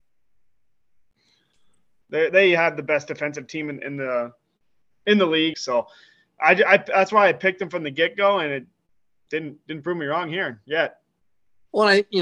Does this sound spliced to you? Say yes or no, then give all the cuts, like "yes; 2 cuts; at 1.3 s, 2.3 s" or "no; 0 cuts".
yes; 2 cuts; at 2.0 s, 5.5 s